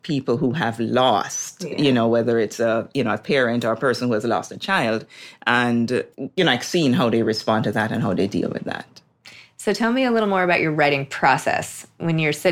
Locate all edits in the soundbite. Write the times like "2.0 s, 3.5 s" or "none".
6.1 s